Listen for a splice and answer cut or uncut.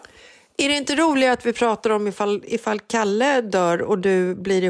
uncut